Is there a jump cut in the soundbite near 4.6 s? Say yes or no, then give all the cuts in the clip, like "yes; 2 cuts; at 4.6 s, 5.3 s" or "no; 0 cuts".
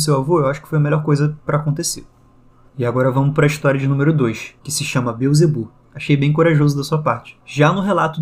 yes; 2 cuts; at 4.6 s, 5.8 s